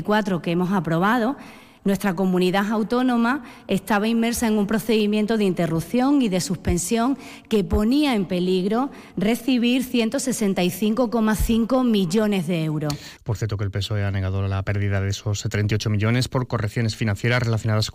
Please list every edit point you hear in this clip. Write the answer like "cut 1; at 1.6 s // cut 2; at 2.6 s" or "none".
none